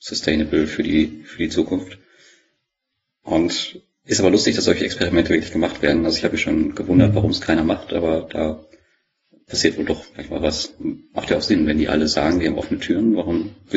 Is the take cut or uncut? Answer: uncut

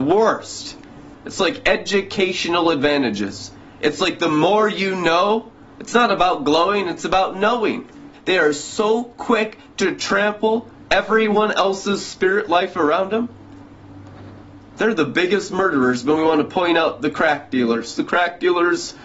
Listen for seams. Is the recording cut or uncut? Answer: cut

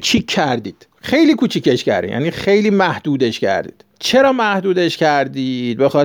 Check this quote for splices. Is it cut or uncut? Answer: cut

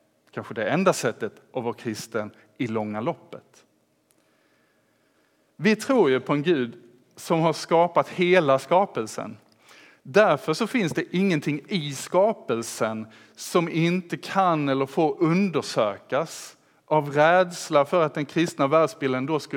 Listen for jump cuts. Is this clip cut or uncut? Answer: uncut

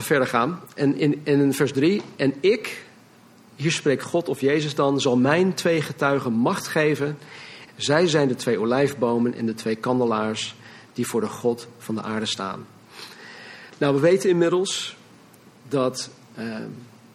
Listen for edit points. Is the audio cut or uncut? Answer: cut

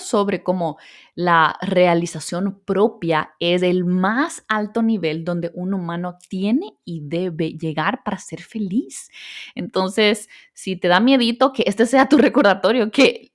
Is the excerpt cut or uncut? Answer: uncut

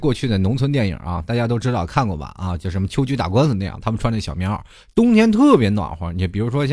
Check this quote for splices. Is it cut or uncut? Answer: uncut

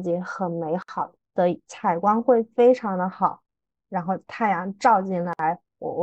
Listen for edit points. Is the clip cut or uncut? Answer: cut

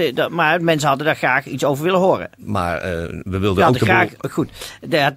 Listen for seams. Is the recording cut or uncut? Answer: cut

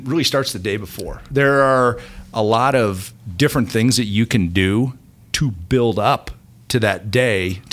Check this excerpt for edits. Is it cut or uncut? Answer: uncut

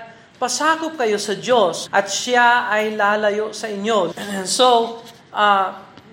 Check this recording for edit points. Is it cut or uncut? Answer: cut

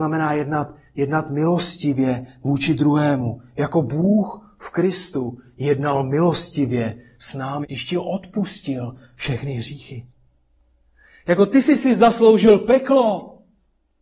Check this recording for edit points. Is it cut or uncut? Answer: cut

